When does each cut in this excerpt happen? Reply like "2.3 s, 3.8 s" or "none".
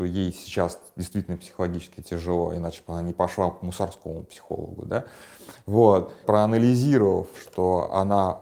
6.2 s, 7.3 s